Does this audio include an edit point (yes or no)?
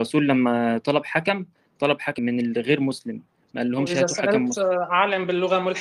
yes